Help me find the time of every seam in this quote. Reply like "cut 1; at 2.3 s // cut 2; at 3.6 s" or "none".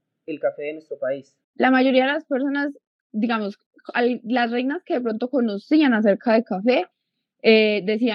cut 1; at 1.4 s